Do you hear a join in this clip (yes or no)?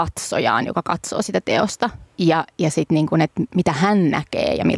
yes